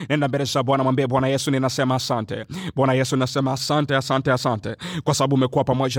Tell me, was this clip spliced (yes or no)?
yes